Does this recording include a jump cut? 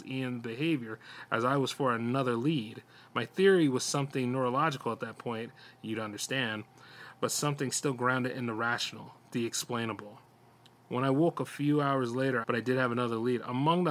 yes; 1 cut; at 12.4 s

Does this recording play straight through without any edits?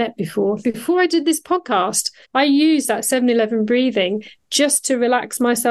no; 1 cut; at 2.2 s

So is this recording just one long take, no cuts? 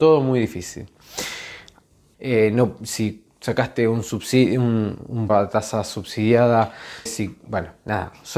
no; 3 cuts; at 2.1 s, 5.3 s, 7.1 s

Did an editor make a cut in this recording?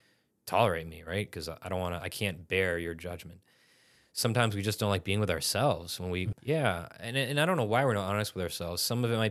yes; 1 cut; at 6.3 s

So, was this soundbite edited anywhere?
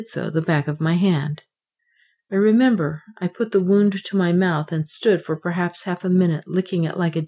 no; 0 cuts

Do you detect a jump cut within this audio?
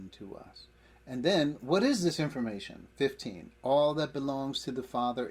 no; 0 cuts

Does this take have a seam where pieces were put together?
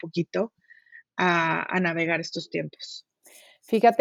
no; 0 cuts

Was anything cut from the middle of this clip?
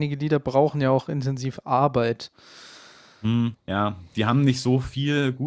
yes; 1 cut; at 3.5 s

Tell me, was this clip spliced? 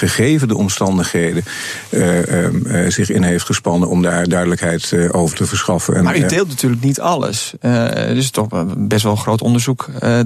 no; 0 cuts

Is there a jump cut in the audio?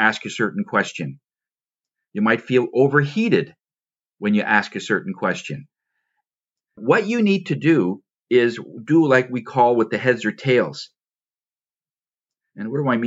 no; 0 cuts

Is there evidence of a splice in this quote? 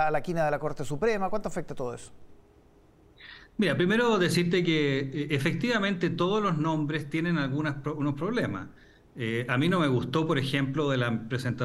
no; 0 cuts

